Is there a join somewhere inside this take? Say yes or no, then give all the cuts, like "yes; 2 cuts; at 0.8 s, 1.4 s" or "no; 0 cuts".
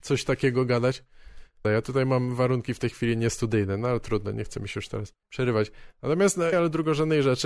yes; 3 cuts; at 1.6 s, 5.2 s, 6.5 s